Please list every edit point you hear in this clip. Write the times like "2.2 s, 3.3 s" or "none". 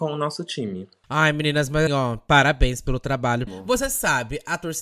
1.9 s, 3.5 s